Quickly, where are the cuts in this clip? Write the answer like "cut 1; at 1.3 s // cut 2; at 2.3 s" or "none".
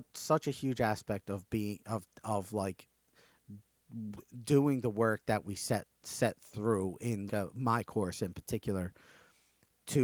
cut 1; at 7.3 s